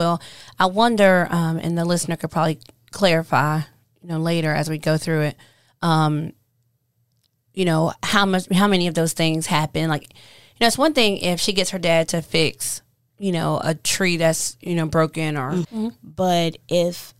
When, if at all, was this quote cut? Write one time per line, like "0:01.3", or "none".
0:15.6